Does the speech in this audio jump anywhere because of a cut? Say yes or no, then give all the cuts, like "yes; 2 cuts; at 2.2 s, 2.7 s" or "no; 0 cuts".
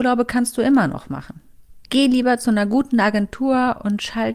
no; 0 cuts